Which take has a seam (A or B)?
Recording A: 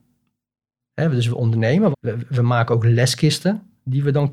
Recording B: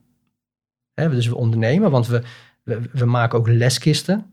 A